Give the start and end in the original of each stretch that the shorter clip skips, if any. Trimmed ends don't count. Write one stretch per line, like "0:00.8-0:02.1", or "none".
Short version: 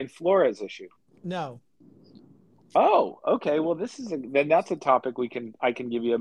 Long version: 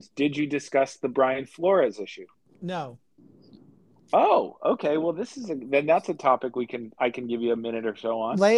none